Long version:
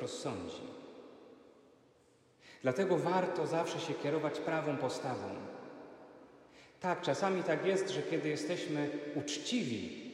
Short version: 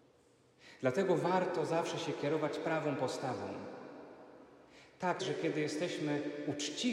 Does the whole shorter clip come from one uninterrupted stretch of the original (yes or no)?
no